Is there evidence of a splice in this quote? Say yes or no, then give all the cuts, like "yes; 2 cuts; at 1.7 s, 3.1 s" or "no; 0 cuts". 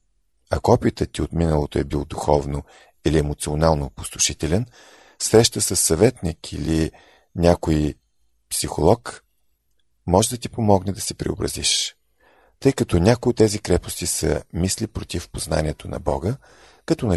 no; 0 cuts